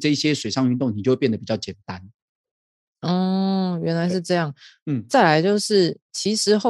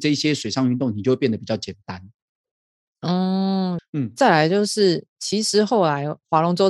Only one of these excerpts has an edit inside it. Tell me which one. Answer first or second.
second